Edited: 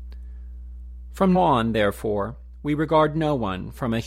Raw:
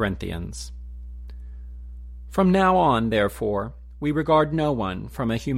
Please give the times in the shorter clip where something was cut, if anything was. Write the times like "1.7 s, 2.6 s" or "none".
1.3 s